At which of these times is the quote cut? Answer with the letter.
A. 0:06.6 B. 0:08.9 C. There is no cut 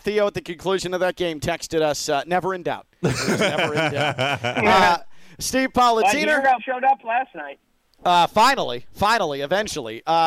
A